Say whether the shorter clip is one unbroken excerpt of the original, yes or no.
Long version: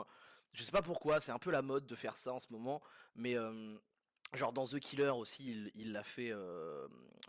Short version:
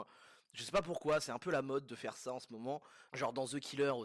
no